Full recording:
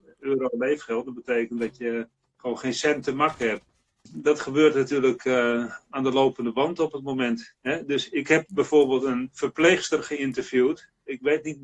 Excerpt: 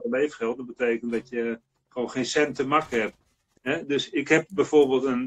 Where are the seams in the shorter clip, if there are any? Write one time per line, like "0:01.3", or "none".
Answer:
0:03.6